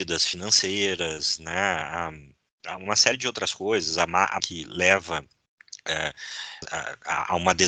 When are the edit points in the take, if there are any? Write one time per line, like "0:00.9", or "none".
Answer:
0:04.4
0:06.6